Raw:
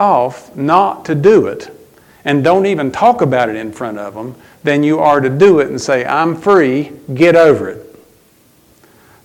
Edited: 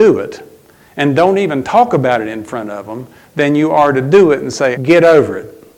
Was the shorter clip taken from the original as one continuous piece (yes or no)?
no